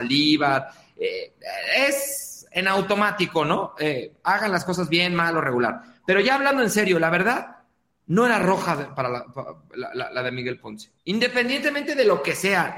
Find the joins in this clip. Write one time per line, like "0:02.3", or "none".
0:11.0

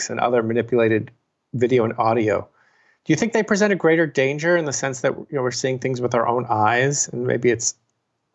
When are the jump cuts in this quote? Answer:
none

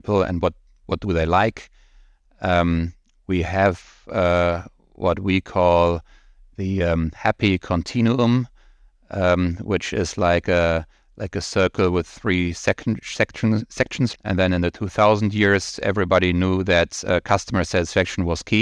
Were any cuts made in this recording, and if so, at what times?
0:14.1

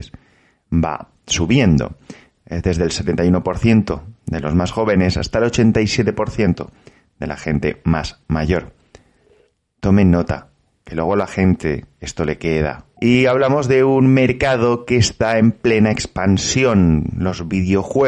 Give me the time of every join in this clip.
0:13.0

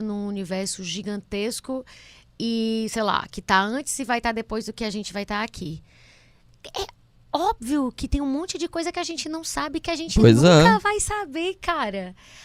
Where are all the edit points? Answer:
none

